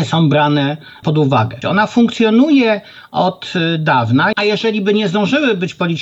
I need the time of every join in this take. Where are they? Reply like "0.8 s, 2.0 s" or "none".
1.6 s, 4.3 s